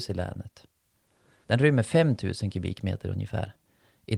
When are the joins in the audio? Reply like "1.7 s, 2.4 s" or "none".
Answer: 1.4 s